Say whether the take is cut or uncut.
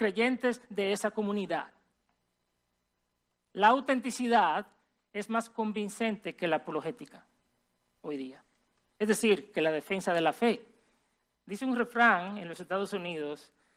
cut